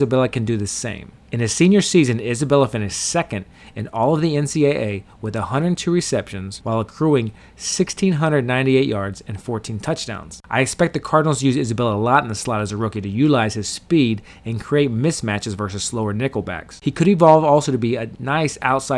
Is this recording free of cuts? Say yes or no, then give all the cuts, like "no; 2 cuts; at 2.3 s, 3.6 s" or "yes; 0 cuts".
yes; 0 cuts